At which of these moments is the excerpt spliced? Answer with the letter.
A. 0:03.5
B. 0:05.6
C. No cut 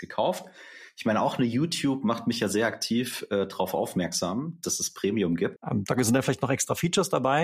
B